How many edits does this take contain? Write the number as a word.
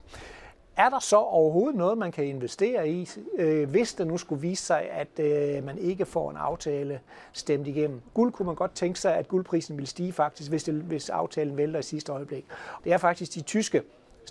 two